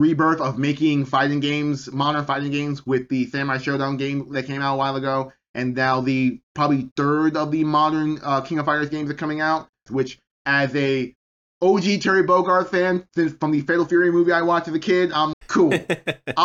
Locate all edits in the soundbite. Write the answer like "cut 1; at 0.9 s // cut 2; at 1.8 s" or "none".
cut 1; at 9.9 s // cut 2; at 15.3 s